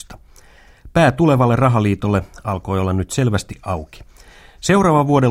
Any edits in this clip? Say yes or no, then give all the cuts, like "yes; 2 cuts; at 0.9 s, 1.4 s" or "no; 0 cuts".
no; 0 cuts